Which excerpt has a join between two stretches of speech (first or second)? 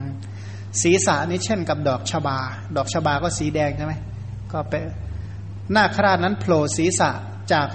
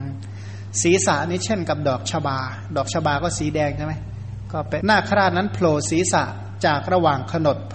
second